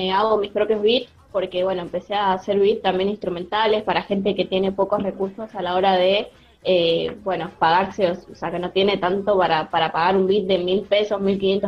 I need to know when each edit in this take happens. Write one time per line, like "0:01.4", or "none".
none